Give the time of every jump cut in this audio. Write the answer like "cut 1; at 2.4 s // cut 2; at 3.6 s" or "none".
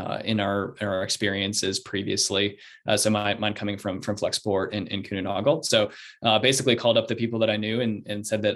none